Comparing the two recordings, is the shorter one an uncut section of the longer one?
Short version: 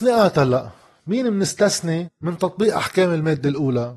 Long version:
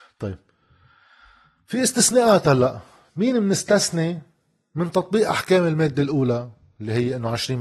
no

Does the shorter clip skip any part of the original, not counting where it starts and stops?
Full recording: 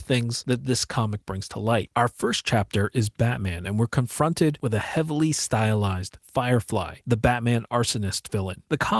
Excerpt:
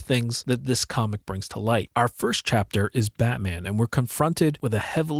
no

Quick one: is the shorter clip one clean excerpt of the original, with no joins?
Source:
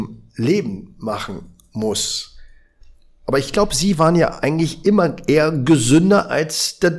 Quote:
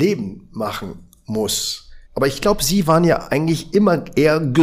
no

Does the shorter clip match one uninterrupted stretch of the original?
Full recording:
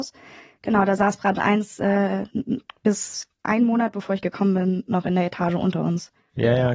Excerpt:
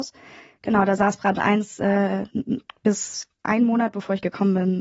yes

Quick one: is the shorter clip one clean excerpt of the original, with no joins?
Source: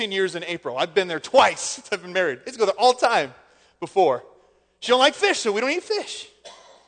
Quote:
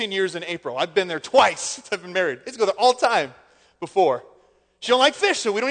yes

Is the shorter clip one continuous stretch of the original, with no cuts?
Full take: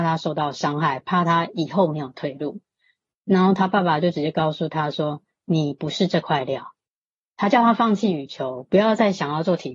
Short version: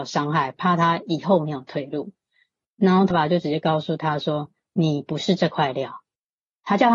no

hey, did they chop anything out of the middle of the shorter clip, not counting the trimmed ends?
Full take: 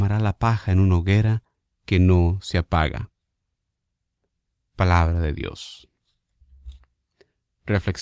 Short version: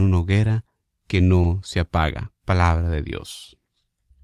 yes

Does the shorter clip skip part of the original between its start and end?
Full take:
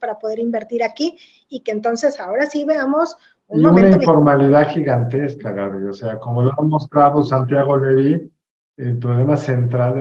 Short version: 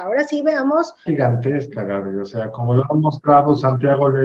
yes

